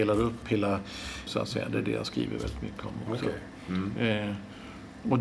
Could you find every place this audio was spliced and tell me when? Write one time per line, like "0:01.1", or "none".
0:01.3